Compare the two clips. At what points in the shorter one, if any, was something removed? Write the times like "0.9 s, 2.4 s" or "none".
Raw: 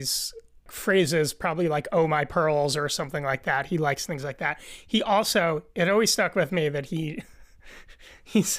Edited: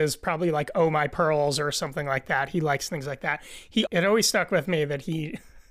3.9 s